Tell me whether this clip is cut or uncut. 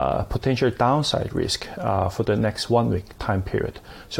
uncut